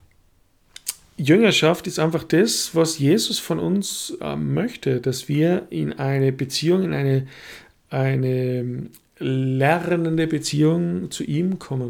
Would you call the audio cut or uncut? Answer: uncut